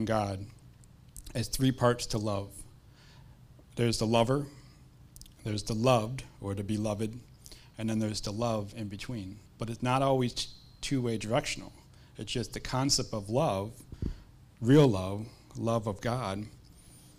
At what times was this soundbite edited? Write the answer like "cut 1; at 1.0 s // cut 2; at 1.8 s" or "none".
cut 1; at 9.5 s